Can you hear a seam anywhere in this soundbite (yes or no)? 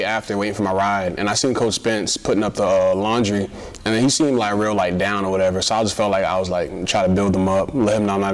no